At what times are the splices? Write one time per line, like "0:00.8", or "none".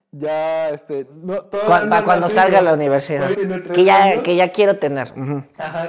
0:03.3